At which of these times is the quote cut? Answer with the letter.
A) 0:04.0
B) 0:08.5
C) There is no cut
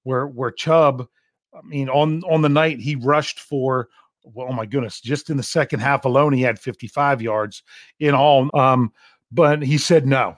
B